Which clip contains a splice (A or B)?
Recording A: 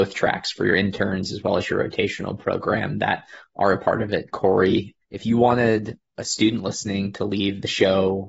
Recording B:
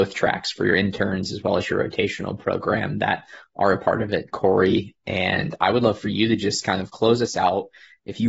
A